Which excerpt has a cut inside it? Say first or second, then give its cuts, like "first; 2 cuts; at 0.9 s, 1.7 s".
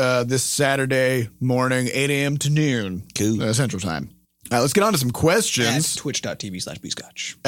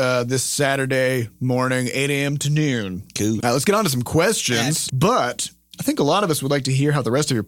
second; 2 cuts; at 3.4 s, 4.9 s